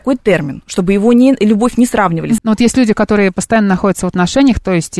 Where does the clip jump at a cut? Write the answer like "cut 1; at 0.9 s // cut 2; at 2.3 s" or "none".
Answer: cut 1; at 2.4 s